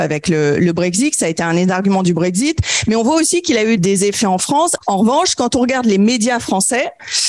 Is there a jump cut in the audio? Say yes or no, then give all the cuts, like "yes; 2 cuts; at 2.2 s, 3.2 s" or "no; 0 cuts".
yes; 2 cuts; at 3.8 s, 4.8 s